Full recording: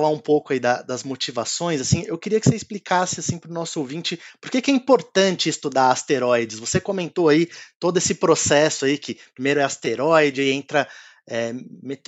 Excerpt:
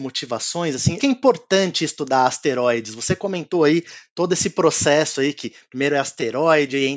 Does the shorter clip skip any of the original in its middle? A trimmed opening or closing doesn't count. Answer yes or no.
yes